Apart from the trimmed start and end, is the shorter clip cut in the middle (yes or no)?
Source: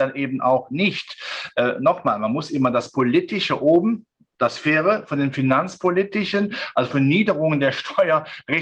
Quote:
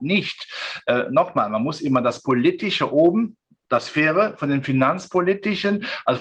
no